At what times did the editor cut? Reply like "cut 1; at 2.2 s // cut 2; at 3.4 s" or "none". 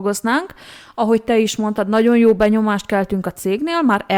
none